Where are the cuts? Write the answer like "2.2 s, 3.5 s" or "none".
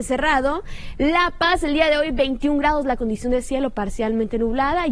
none